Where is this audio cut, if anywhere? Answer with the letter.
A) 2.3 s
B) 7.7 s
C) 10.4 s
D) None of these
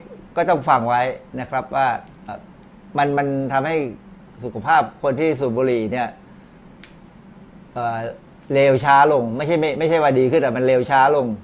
A